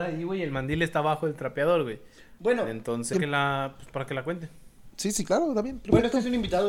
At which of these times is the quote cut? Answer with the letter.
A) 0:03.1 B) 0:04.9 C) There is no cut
A